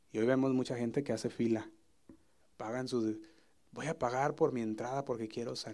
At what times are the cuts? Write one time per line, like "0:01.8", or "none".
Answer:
0:02.4